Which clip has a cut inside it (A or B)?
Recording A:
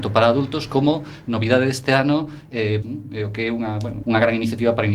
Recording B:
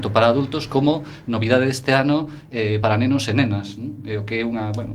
A